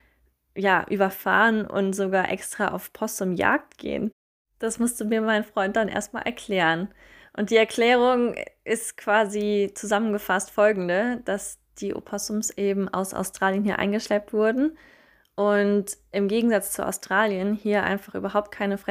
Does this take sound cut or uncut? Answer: uncut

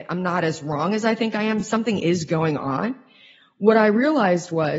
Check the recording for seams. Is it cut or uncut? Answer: uncut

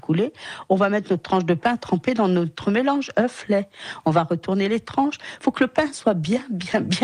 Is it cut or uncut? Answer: uncut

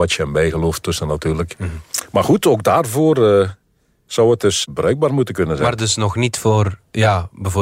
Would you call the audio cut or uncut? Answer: uncut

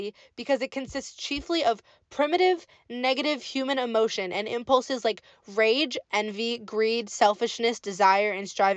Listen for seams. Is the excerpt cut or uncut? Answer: uncut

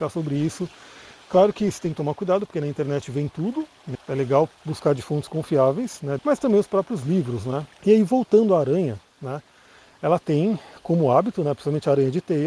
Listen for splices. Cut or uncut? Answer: cut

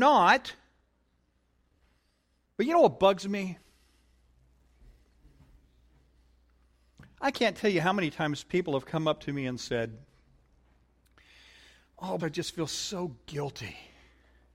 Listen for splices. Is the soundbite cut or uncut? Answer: cut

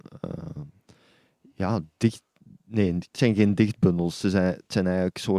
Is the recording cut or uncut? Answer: uncut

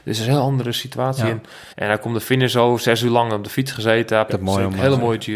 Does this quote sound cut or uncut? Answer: cut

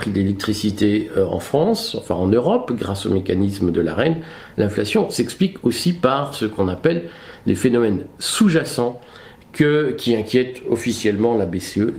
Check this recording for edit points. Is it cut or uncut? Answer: uncut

